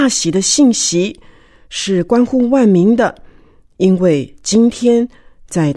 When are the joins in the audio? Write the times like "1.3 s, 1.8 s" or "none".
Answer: none